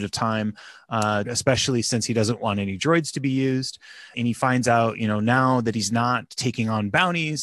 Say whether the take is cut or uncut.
cut